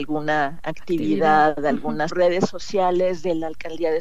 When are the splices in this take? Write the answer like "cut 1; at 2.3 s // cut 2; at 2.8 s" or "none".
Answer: cut 1; at 2.1 s